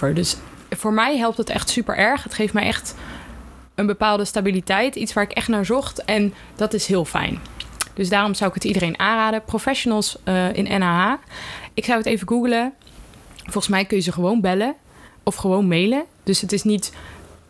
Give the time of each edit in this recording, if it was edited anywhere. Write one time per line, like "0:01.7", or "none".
none